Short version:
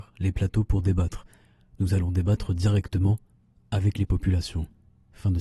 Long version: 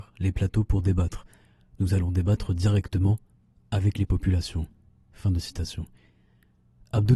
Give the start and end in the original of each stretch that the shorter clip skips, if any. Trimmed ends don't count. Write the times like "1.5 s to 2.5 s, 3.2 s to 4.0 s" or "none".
none